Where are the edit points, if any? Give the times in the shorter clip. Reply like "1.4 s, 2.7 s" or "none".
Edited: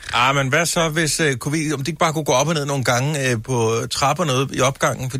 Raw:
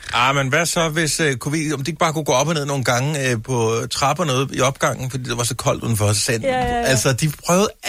none

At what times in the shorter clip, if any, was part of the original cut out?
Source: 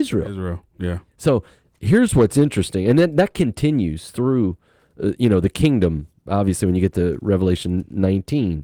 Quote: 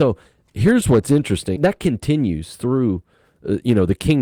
1.6 s

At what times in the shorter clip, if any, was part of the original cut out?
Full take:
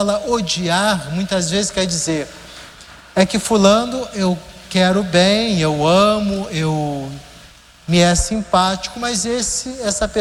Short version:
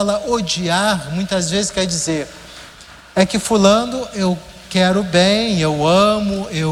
none

